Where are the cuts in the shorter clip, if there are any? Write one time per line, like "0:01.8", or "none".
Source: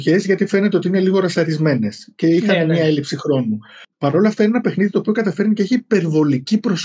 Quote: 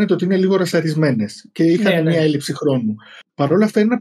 none